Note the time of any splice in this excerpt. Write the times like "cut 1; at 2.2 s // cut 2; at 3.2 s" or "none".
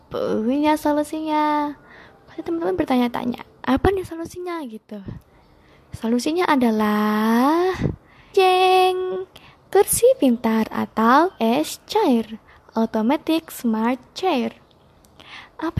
cut 1; at 8.3 s // cut 2; at 11.3 s